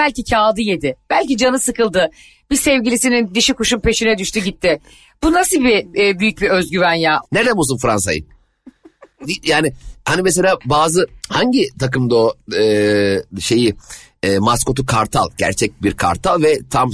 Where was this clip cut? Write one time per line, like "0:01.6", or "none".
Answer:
0:07.2
0:09.2
0:11.2